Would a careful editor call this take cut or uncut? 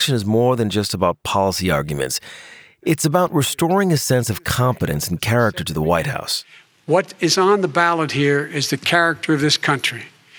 uncut